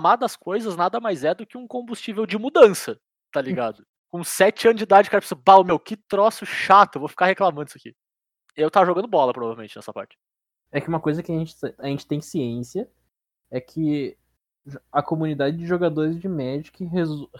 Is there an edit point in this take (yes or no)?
yes